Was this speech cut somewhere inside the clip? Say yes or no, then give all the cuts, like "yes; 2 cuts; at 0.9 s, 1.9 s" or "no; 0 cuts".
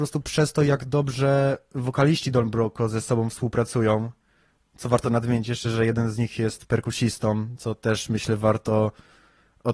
no; 0 cuts